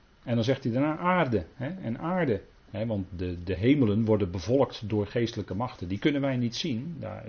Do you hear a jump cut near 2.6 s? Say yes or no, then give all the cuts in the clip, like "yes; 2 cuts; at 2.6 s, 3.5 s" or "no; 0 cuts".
yes; 1 cut; at 2.6 s